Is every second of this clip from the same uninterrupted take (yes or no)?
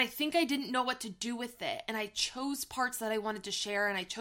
yes